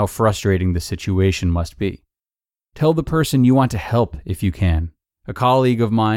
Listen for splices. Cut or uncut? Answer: cut